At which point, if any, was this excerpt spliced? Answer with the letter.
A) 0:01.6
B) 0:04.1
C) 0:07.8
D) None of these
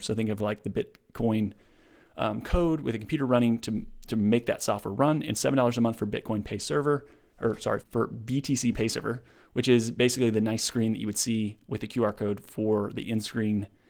C